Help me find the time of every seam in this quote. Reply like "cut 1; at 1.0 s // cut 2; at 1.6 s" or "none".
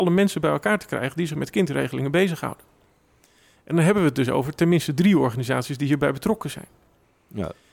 none